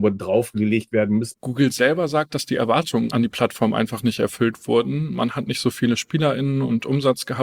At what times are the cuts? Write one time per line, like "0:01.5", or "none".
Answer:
0:01.3